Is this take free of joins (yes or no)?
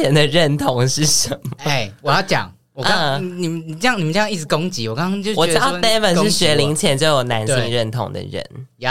yes